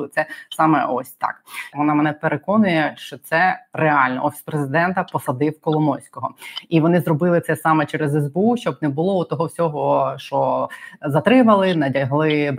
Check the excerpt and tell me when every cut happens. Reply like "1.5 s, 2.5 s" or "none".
1.7 s